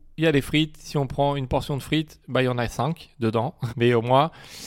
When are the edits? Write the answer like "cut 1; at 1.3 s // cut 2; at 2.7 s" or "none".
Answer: cut 1; at 3.7 s